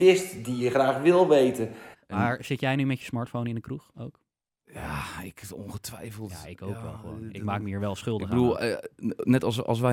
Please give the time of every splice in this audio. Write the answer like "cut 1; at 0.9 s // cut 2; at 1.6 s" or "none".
cut 1; at 1.9 s

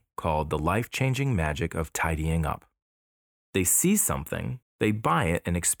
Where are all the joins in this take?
cut 1; at 3.5 s // cut 2; at 4.6 s

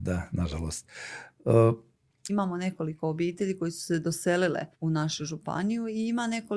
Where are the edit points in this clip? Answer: cut 1; at 2.3 s // cut 2; at 4.7 s

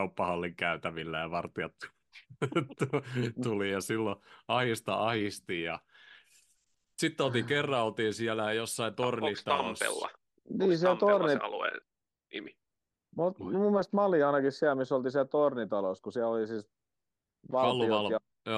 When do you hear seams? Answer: none

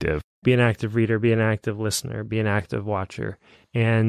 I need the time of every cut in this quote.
none

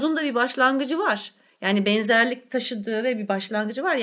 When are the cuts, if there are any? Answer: none

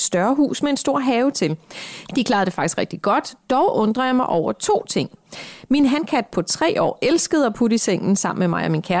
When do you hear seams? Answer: cut 1; at 2.1 s

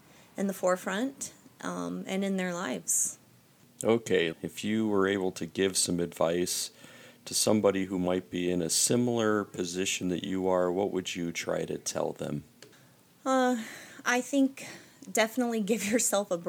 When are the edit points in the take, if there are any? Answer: cut 1; at 4.3 s

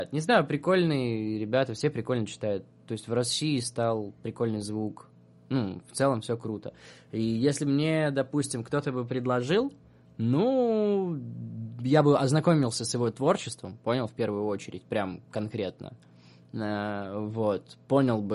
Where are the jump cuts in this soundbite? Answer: none

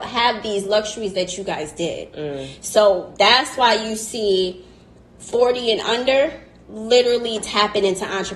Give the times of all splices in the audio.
none

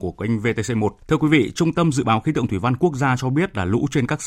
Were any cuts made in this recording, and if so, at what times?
cut 1; at 1.0 s

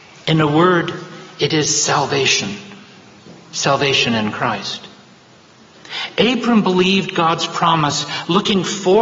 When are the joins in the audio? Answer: none

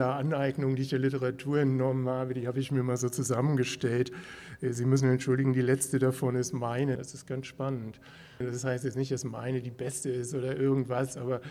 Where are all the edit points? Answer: cut 1; at 7.0 s // cut 2; at 8.4 s

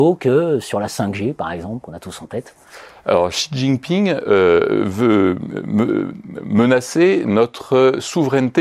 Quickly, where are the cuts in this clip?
none

